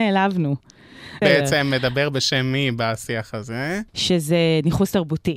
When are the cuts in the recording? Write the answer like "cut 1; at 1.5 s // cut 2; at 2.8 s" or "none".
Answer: cut 1; at 1.2 s // cut 2; at 3.9 s